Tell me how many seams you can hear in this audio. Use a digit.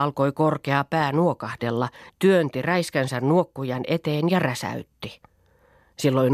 1